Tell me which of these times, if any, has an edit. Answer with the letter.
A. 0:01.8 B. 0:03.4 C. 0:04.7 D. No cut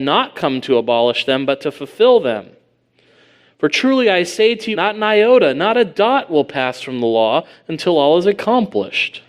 C